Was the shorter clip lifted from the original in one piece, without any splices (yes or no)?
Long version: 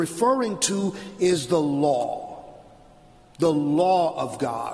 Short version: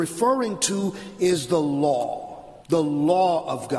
no